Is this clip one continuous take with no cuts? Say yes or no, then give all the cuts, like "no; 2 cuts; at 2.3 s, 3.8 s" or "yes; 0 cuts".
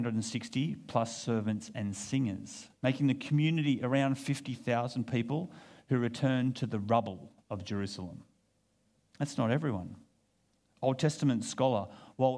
no; 2 cuts; at 2.8 s, 7.4 s